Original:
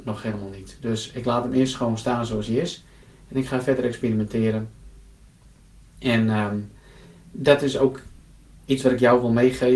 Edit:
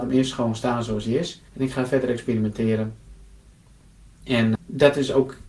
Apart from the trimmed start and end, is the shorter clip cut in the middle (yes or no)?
yes